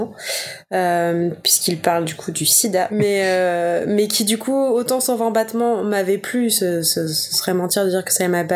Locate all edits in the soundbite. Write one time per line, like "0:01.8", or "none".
0:02.9